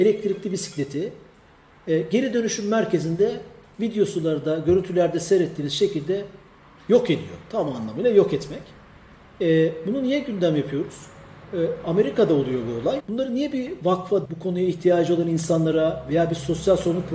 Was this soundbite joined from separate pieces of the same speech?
yes; 2 cuts; at 13.0 s, 14.2 s

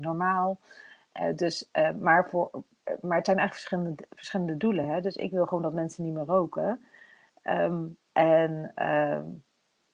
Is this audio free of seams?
yes; 0 cuts

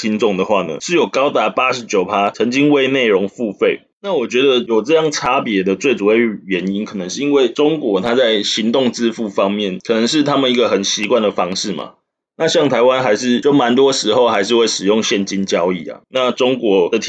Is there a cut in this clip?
no; 0 cuts

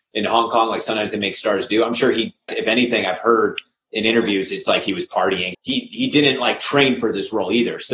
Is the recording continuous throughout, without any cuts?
no; 2 cuts; at 2.5 s, 5.5 s

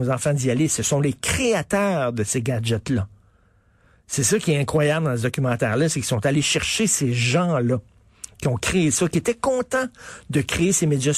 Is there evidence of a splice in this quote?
no; 0 cuts

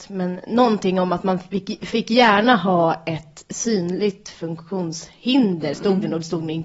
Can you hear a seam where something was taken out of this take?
no; 0 cuts

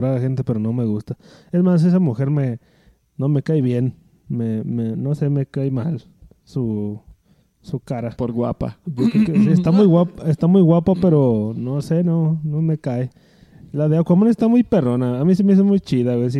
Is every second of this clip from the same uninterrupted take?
yes; 0 cuts

